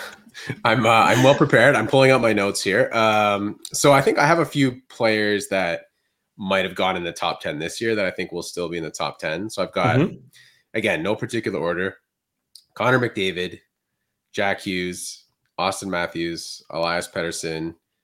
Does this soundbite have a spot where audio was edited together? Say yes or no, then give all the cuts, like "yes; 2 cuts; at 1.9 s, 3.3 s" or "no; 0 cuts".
no; 0 cuts